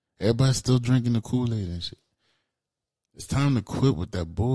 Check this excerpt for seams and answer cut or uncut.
uncut